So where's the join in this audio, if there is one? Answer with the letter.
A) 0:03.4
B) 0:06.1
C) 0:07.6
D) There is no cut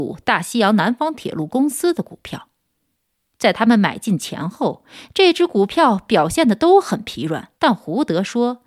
C